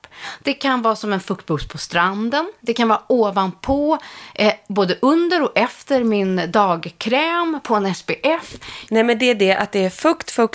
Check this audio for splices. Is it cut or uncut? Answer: cut